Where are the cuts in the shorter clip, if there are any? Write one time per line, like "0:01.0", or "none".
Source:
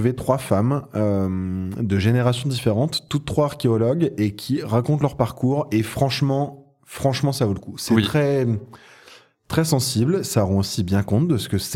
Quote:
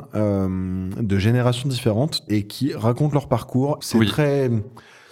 0:02.3
0:03.8